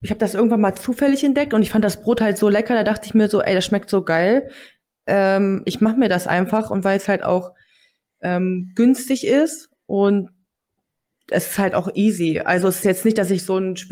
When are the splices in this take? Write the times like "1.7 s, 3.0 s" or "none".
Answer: none